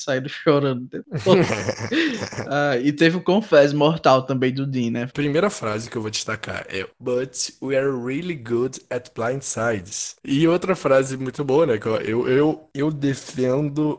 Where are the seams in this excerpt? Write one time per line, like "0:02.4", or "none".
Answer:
0:05.1
0:06.9
0:10.2

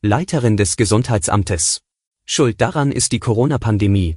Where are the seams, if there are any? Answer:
0:02.0

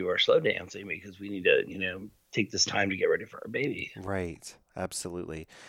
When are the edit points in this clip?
none

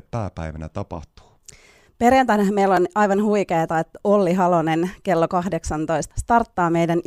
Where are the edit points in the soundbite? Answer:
0:06.1

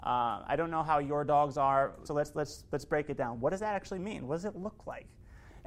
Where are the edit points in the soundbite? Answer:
0:02.1

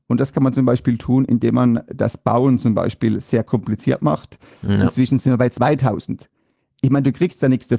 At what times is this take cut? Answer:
0:04.6

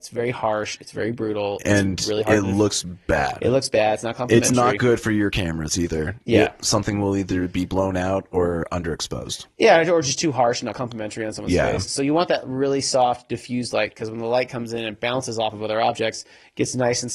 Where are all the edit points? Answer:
none

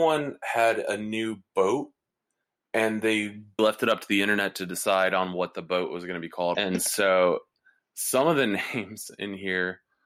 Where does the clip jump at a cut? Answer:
0:03.6
0:06.5

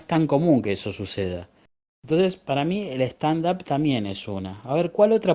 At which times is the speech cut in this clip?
none

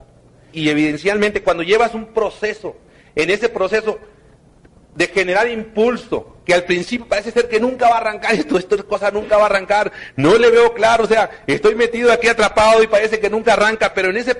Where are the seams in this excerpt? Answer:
none

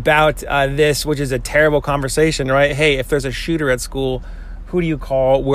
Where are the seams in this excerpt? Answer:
none

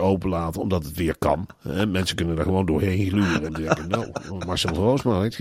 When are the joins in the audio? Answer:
0:03.5

